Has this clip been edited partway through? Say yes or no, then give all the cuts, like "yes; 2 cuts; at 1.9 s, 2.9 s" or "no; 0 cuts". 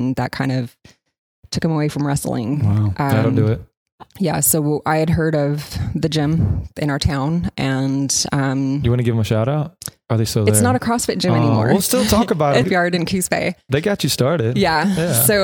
yes; 1 cut; at 12.6 s